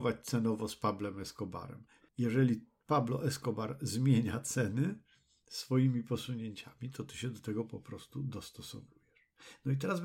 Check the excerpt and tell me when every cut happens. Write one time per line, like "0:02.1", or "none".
0:02.0